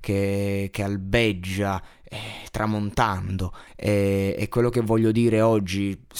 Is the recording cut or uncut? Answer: cut